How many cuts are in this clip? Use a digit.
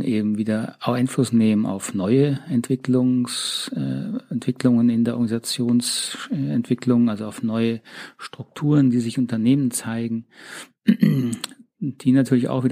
0